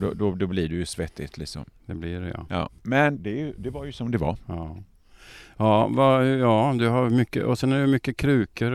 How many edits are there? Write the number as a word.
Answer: one